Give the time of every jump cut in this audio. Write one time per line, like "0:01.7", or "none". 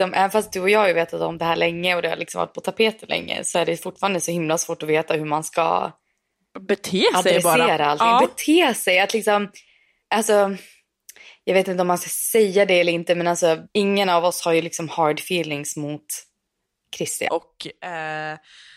0:10.0
0:13.7
0:17.3